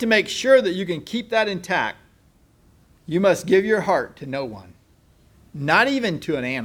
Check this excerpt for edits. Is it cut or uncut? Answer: uncut